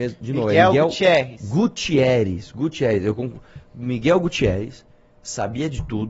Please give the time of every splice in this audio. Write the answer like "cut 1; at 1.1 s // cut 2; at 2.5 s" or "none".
none